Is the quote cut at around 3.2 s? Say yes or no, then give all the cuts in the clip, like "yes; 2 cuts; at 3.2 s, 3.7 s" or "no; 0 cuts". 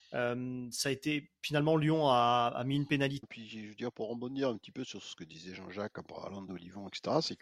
yes; 2 cuts; at 3.2 s, 6.5 s